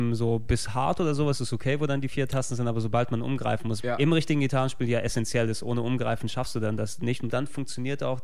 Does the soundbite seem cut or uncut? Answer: cut